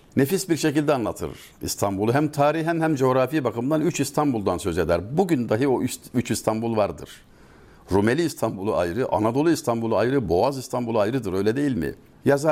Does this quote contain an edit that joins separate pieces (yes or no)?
no